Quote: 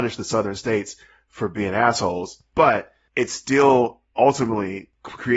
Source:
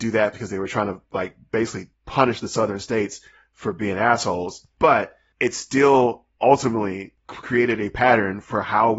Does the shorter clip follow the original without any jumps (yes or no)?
yes